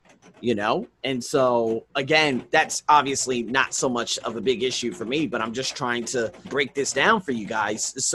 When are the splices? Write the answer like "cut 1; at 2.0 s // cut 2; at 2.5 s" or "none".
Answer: cut 1; at 1.9 s // cut 2; at 6.4 s